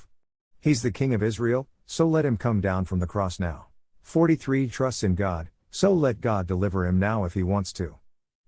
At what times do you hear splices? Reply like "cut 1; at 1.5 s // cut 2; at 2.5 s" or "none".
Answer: cut 1; at 3.8 s